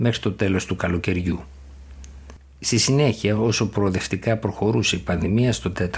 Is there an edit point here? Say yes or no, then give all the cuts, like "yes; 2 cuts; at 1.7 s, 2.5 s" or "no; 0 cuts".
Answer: no; 0 cuts